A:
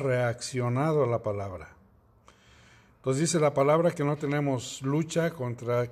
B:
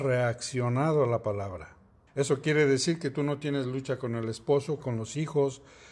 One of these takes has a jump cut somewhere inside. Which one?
B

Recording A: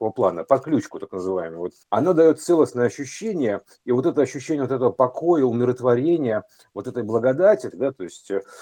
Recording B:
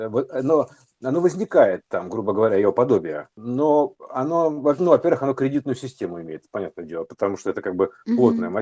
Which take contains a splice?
A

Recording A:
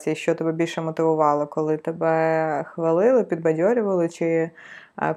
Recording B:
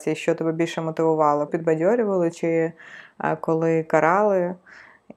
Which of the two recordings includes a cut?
B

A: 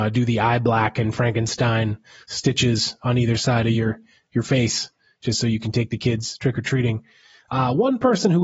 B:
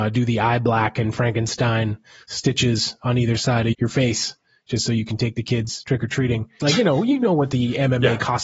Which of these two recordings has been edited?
B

